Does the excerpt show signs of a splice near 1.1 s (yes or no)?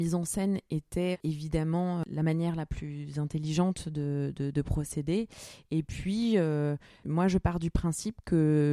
yes